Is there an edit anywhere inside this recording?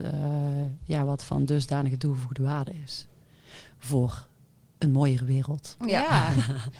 no; 0 cuts

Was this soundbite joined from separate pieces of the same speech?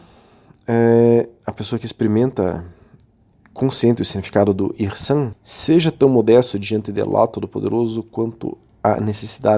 yes; 1 cut; at 5.3 s

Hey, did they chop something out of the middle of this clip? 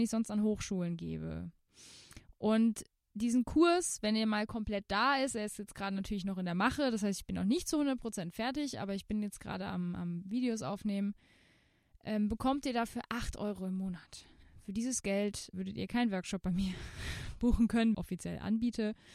yes; 2 cuts; at 15.5 s, 17.9 s

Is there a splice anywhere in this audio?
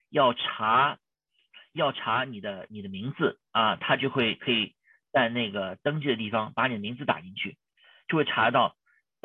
yes; 1 cut; at 3.5 s

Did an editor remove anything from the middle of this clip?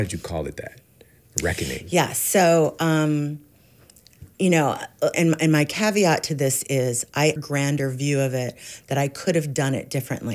yes; 2 cuts; at 5.1 s, 7.4 s

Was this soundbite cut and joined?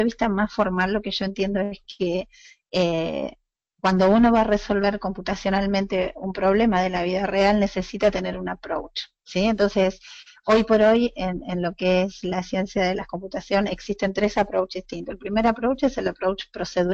no; 0 cuts

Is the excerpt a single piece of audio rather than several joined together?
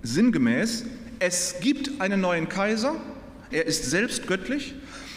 no; 1 cut; at 3.5 s

